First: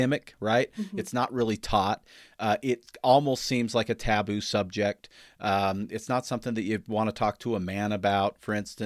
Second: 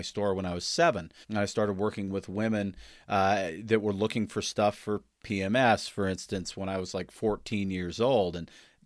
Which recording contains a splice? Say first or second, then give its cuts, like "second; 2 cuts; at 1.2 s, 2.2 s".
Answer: second; 1 cut; at 1.2 s